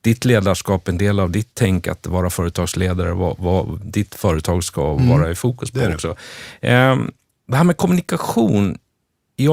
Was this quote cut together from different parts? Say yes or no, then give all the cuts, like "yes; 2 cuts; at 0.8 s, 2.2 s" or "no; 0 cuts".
no; 0 cuts